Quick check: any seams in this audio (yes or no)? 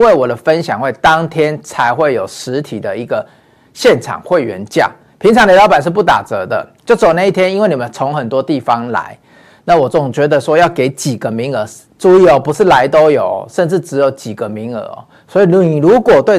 no